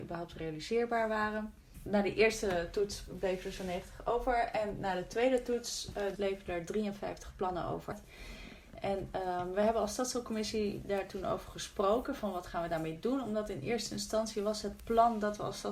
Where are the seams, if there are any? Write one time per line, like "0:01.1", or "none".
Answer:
0:06.1